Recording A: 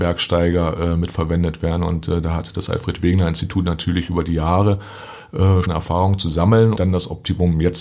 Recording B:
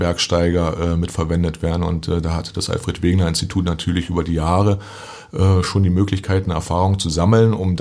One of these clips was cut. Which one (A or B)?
A